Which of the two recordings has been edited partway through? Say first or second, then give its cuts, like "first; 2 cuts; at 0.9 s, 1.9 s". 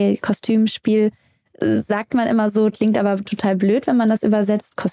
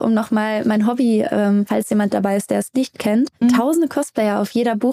second; 2 cuts; at 1.7 s, 3.4 s